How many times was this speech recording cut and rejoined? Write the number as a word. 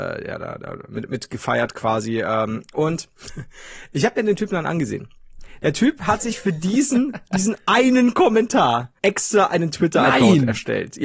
one